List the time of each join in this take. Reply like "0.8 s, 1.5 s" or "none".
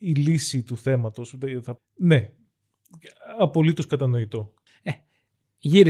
1.8 s, 4.7 s